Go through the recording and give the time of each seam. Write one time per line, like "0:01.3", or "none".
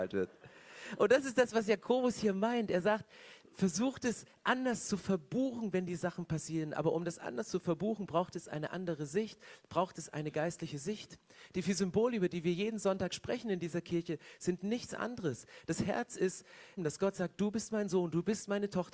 0:16.8

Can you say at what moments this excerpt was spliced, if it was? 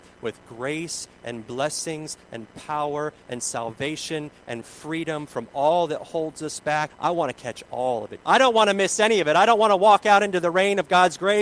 0:06.9
0:08.2

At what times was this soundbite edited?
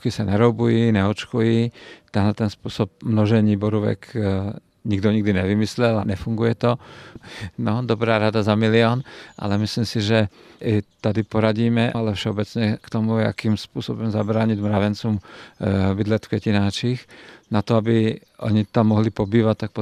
0:07.2
0:11.9

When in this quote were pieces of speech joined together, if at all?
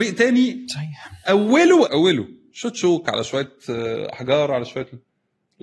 0:01.9

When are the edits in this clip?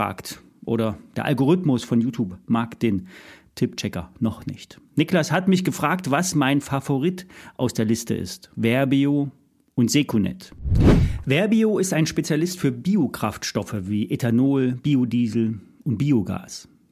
0:08.5

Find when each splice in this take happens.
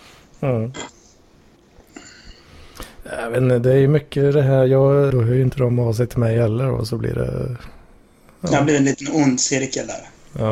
0:05.1

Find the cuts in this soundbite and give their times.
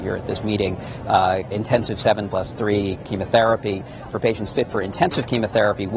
0:01.5
0:04.1

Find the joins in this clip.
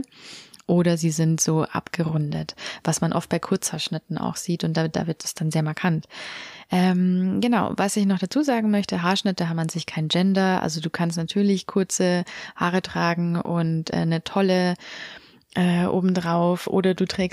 none

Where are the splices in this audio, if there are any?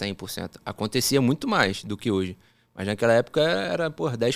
none

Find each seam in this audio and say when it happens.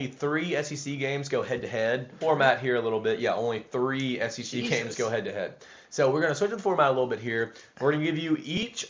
0:02.2

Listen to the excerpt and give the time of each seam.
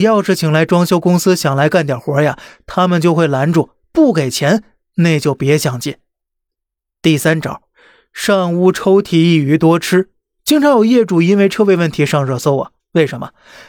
none

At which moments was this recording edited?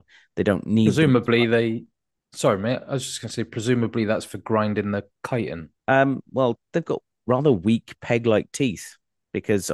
0:05.8

